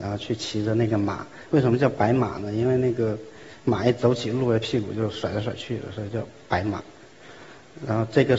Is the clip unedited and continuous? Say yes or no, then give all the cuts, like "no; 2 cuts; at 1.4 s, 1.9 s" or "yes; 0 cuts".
yes; 0 cuts